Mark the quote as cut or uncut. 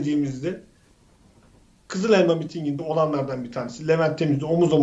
uncut